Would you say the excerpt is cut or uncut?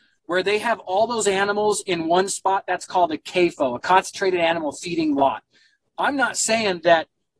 uncut